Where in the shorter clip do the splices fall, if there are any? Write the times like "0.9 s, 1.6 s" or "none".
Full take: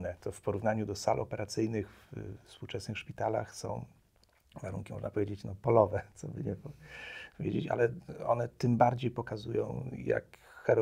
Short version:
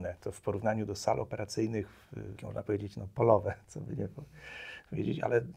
2.4 s